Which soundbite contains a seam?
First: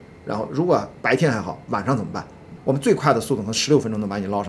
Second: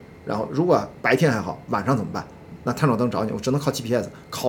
first; 1 cut; at 2.6 s

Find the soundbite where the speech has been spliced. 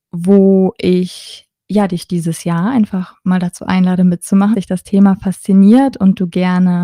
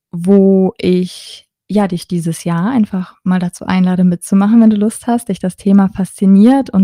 first; 1 cut; at 4.5 s

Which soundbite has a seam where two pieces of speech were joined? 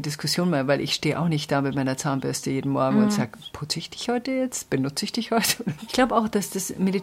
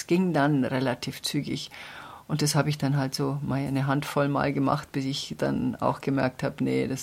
first; 1 cut; at 5.9 s

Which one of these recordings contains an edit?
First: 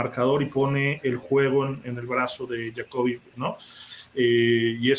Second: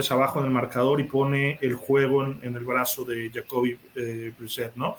first; 1 cut; at 3.3 s

